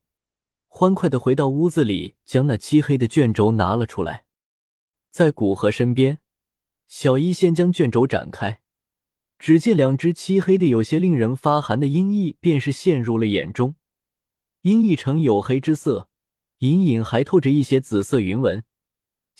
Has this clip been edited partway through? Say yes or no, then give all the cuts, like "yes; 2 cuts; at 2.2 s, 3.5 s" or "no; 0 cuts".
no; 0 cuts